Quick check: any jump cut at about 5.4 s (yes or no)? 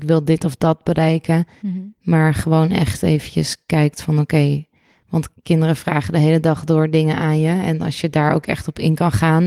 yes